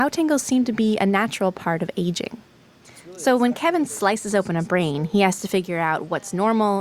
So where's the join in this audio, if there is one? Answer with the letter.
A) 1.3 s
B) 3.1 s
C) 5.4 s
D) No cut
D